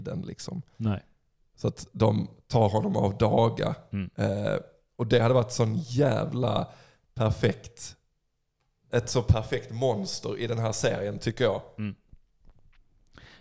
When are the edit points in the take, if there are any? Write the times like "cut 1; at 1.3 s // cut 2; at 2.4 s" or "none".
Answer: cut 1; at 8.9 s